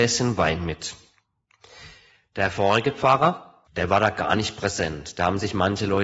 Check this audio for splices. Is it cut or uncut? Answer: cut